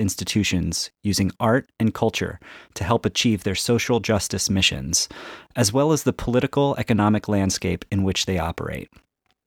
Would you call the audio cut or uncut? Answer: uncut